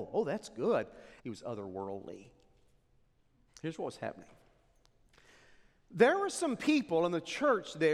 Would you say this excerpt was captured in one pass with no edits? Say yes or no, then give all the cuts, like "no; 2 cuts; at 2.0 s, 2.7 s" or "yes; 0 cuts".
no; 2 cuts; at 1.2 s, 3.5 s